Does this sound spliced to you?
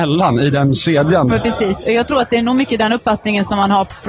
yes; 1 cut; at 1.3 s

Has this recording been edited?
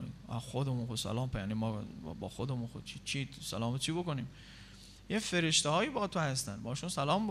no; 0 cuts

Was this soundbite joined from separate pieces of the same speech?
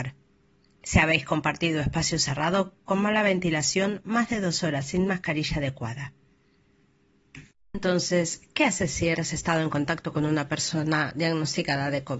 yes; 1 cut; at 9.2 s

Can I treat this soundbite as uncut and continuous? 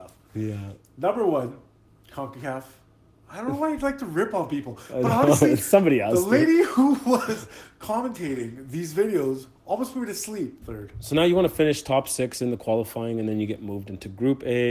no; 1 cut; at 10.6 s

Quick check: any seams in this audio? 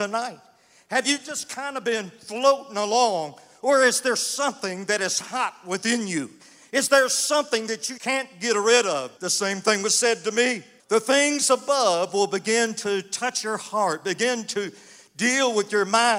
yes; 3 cuts; at 8.0 s, 9.2 s, 10.8 s

